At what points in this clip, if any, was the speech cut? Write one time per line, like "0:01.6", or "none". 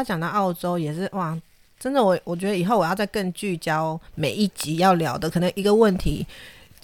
none